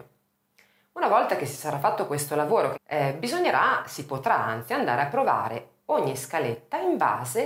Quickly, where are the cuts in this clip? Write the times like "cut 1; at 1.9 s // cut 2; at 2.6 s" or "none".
cut 1; at 2.7 s